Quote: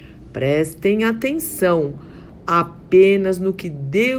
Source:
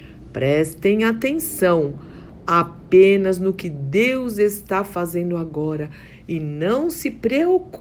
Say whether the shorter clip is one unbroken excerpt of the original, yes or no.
yes